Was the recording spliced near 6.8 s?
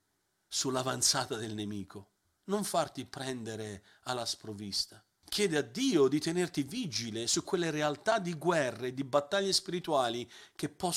no; 2 cuts; at 2.4 s, 5.2 s

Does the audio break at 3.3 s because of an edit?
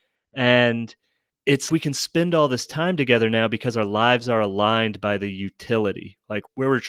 no; 1 cut; at 1.7 s

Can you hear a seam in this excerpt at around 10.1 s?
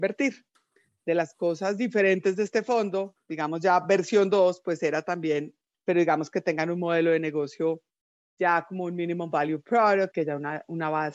yes; 2 cuts; at 5.7 s, 10.1 s

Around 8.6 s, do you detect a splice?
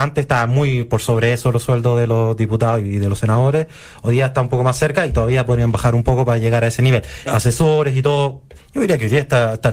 yes; 2 cuts; at 7.2 s, 8.6 s

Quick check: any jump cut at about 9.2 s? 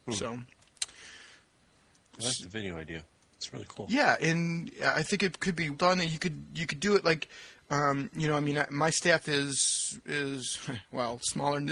no; 1 cut; at 5.7 s

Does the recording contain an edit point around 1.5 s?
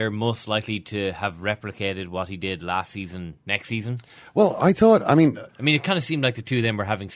no; 2 cuts; at 3.4 s, 5.5 s

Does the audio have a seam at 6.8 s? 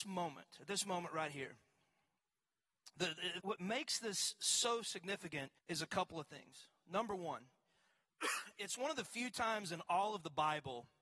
no; 2 cuts; at 3.4 s, 5.6 s

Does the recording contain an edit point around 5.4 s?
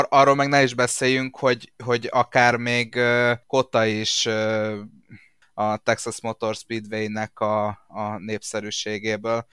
yes; 2 cuts; at 3.4 s, 5.4 s

